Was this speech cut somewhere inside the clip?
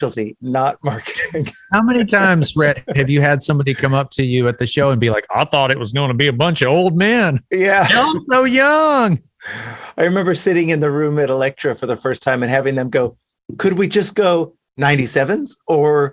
no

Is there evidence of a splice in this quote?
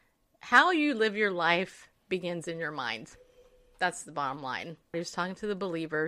yes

